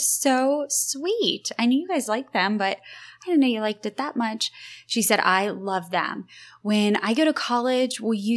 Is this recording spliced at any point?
no; 0 cuts

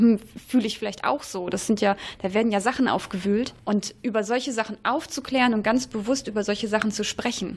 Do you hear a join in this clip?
no; 0 cuts

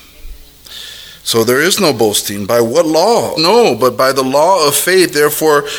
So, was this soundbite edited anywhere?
yes; 1 cut; at 3.4 s

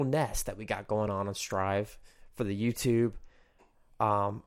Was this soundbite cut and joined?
no; 0 cuts

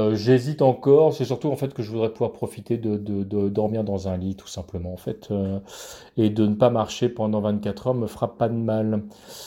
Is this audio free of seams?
yes; 0 cuts

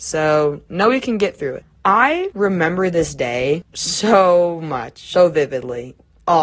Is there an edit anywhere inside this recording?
no; 0 cuts

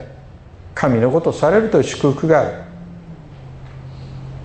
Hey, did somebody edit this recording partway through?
no; 0 cuts

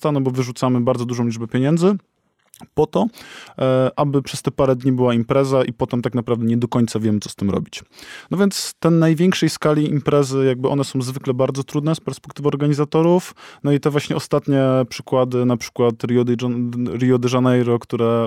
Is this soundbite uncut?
yes; 0 cuts

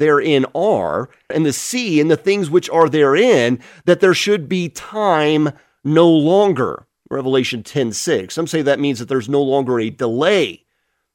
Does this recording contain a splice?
yes; 1 cut; at 1.3 s

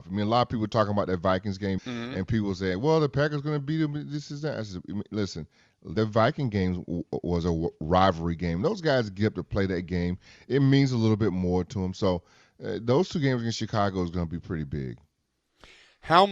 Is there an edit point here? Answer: yes; 2 cuts; at 1.8 s, 6.0 s

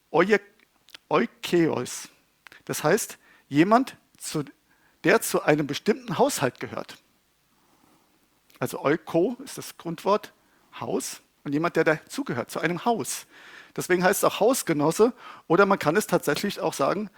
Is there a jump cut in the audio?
no; 0 cuts

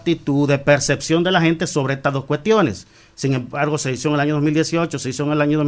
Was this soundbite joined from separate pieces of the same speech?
no; 0 cuts

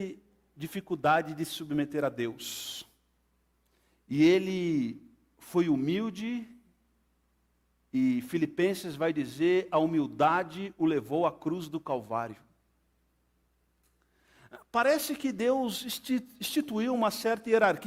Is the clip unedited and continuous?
yes; 0 cuts

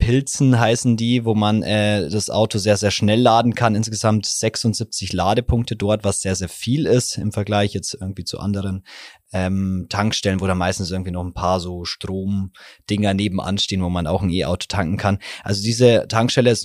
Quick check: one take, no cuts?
yes; 0 cuts

